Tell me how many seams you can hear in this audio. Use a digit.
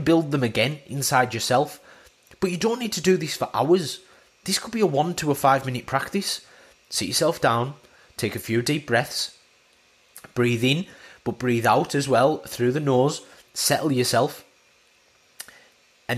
1